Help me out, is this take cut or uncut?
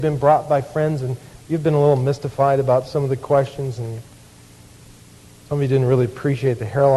uncut